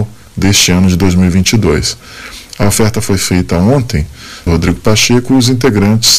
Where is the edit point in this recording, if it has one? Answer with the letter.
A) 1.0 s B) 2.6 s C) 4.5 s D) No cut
C